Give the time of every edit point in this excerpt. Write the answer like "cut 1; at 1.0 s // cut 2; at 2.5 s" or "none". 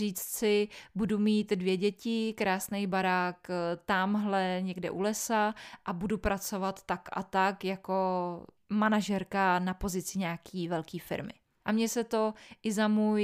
cut 1; at 11.6 s